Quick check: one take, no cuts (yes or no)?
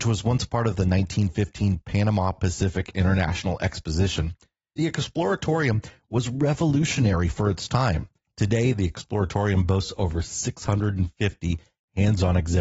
no